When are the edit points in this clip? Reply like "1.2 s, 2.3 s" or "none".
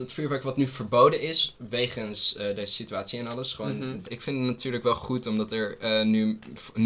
4.0 s